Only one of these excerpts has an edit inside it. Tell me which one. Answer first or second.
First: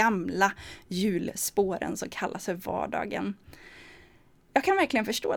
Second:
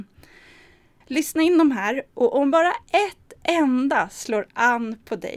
second